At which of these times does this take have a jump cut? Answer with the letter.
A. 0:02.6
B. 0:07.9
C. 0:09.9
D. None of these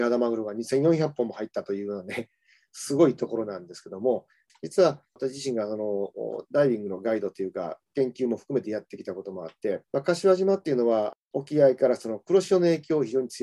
C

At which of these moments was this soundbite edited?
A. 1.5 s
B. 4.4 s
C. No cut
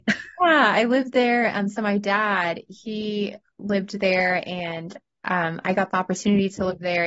C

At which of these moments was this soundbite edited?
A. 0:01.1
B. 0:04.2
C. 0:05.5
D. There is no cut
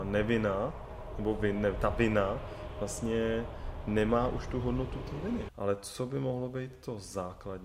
C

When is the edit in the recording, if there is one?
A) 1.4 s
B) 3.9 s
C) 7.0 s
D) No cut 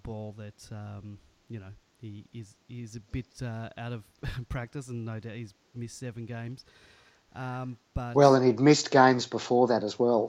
D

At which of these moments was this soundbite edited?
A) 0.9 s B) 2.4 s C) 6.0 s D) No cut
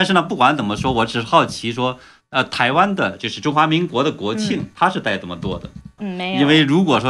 C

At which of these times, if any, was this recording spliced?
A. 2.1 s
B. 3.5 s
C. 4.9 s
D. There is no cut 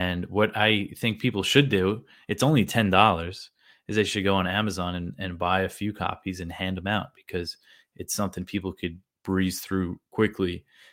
D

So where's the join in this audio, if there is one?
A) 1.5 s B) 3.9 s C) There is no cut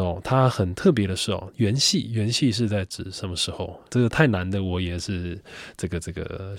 B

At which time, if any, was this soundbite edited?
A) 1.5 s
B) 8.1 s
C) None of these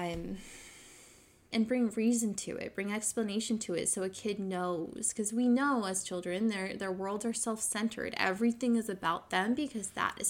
A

